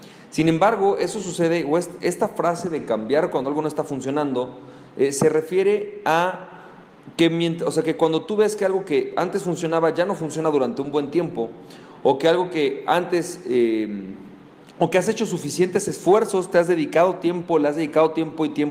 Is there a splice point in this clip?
no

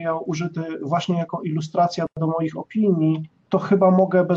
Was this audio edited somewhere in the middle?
yes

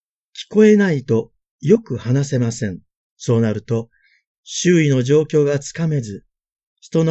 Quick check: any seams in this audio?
yes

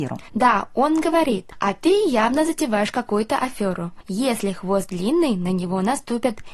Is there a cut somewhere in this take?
no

